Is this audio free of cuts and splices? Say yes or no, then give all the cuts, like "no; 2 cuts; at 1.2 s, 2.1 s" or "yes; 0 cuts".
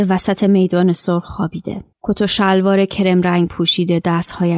no; 1 cut; at 1.9 s